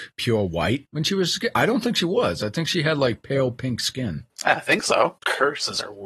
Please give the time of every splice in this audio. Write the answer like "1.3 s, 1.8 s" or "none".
none